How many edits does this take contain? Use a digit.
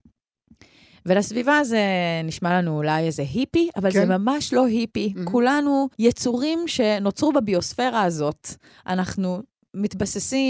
1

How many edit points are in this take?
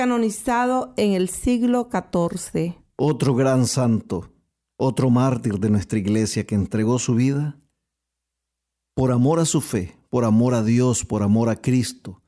0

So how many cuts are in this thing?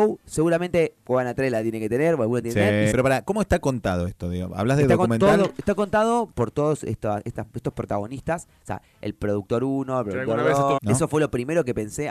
2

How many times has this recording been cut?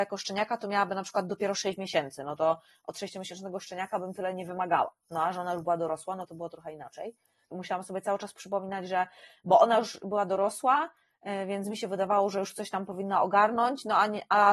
1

